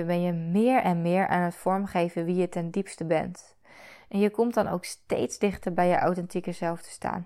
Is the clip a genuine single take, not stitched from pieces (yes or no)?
yes